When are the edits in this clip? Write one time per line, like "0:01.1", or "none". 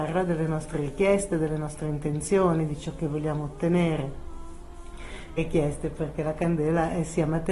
0:05.4